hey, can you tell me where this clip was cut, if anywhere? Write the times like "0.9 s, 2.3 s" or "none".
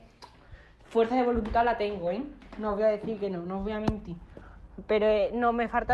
none